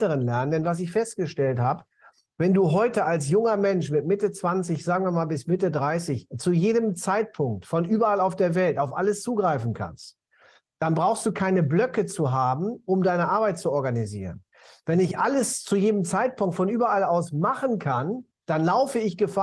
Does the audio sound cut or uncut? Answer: uncut